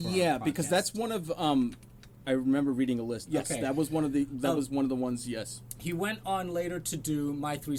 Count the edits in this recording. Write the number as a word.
two